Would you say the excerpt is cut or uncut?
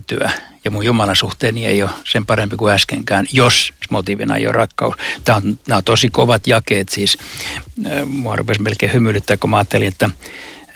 uncut